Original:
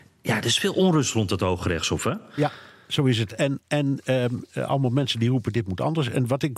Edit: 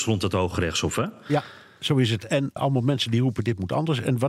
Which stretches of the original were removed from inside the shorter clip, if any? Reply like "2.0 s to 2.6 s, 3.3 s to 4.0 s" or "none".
3.6 s to 4.6 s